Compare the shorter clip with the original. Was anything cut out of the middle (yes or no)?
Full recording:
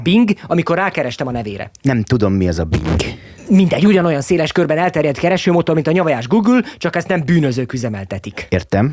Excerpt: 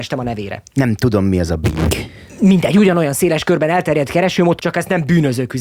yes